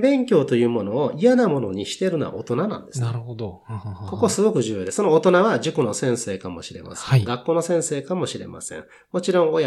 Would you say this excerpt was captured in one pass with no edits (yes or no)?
yes